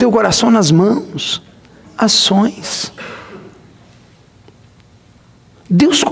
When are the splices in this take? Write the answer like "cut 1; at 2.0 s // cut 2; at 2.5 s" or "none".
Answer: cut 1; at 1.8 s

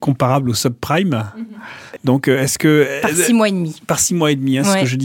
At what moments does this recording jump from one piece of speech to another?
cut 1; at 2.0 s

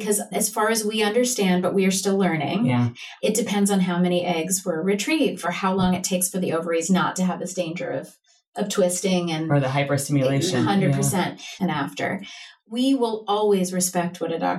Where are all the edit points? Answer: cut 1; at 5.4 s // cut 2; at 11.6 s

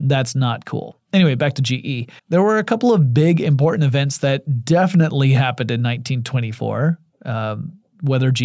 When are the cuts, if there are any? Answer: cut 1; at 2.2 s

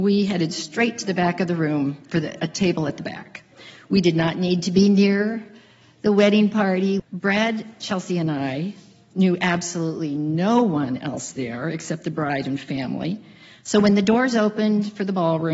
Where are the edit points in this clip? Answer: cut 1; at 7.0 s

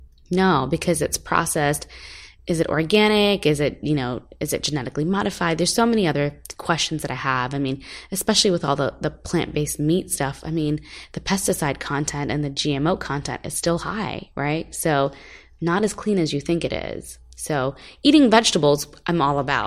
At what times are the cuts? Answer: none

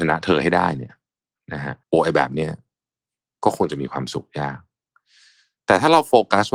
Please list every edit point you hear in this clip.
cut 1; at 1.8 s

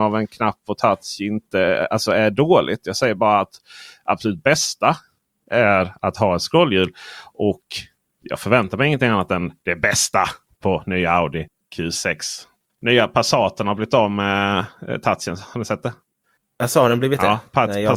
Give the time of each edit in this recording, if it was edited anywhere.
none

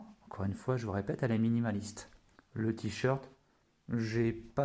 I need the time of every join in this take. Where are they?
cut 1; at 2.4 s

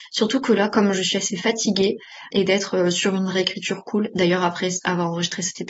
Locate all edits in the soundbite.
cut 1; at 2.3 s

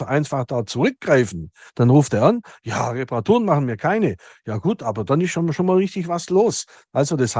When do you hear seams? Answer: cut 1; at 1.7 s

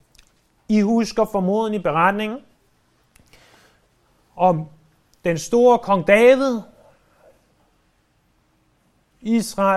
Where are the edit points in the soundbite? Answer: none

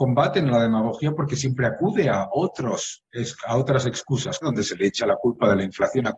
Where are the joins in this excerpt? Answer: cut 1; at 4.4 s

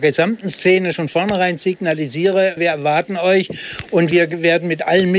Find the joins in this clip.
cut 1; at 0.9 s // cut 2; at 2.6 s

